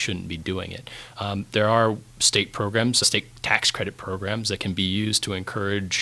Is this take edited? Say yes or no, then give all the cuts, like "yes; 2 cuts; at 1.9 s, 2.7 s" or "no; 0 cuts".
yes; 1 cut; at 3.0 s